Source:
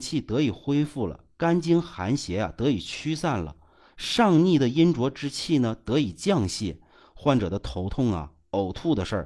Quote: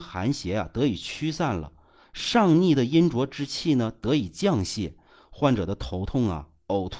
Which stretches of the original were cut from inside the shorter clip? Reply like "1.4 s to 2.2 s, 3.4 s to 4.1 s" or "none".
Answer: none